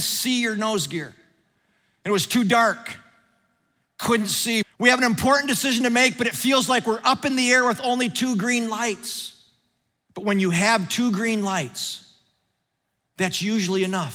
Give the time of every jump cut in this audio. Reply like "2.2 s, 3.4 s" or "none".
4.6 s, 10.1 s